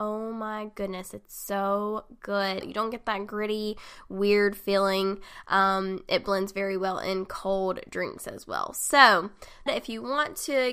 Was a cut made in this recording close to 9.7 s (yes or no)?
yes